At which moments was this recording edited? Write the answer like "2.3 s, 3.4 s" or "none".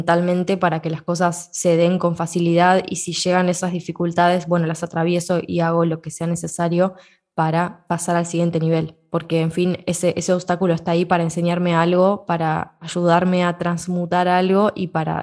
none